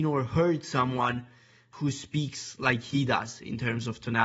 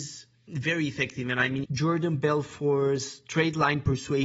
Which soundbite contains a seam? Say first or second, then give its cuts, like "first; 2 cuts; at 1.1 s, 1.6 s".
second; 1 cut; at 1.6 s